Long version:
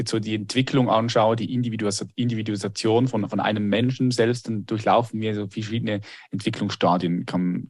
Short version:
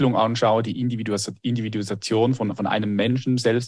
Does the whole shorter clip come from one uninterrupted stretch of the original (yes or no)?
yes